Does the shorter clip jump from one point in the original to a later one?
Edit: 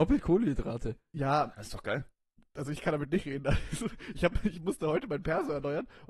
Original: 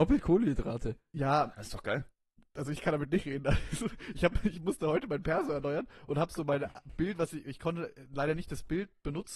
no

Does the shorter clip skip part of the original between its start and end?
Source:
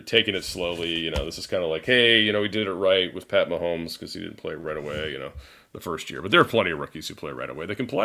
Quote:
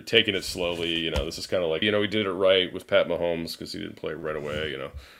yes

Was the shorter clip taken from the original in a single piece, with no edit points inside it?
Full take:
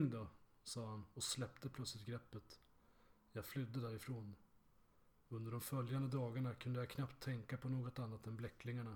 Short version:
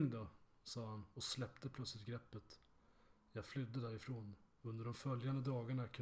no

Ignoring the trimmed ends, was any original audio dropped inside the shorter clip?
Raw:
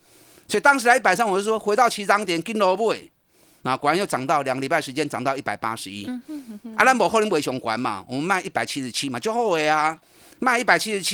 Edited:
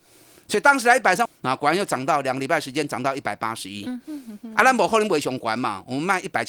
yes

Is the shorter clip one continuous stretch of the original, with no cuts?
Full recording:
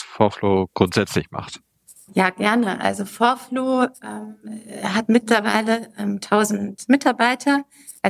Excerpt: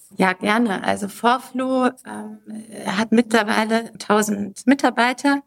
no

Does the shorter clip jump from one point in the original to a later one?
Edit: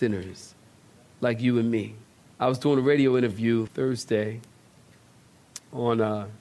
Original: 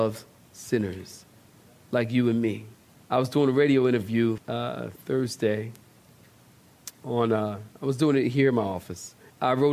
yes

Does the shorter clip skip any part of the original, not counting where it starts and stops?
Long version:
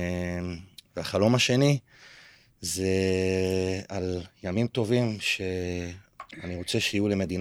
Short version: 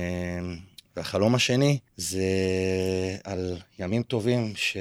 yes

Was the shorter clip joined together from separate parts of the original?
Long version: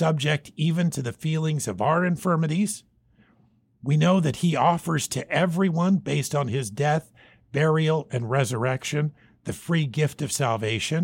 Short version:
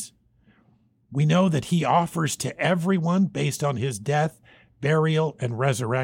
no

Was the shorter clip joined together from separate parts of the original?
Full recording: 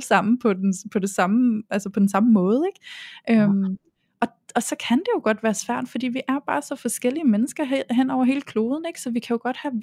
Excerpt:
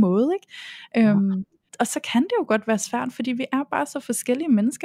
yes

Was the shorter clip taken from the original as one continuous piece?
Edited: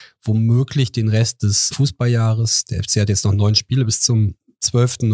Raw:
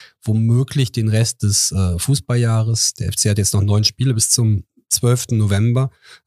no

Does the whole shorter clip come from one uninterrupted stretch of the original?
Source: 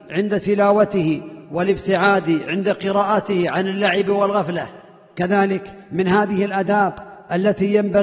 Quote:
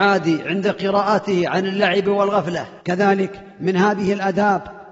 no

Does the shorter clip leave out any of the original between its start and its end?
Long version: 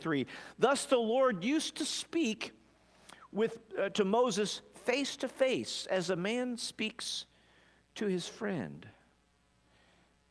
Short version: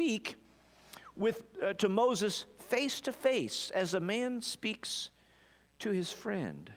no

